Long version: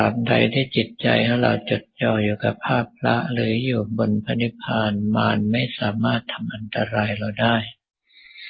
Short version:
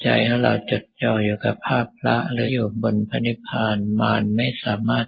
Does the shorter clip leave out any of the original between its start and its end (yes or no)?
yes